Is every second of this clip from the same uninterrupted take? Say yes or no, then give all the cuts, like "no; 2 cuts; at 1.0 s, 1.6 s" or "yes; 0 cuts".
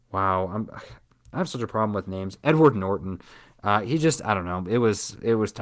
yes; 0 cuts